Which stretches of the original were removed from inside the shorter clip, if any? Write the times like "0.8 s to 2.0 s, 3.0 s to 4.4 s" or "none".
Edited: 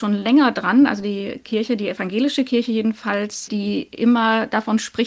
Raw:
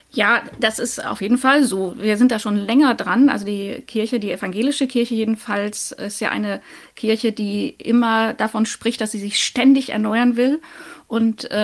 5.9 s to 7.3 s